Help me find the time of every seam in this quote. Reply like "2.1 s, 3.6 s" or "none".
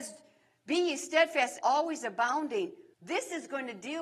1.6 s, 2.9 s